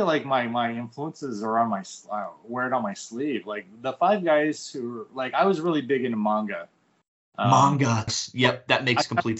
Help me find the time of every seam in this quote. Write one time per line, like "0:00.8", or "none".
0:08.1